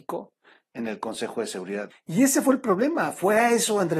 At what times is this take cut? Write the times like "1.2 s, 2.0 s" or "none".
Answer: 1.9 s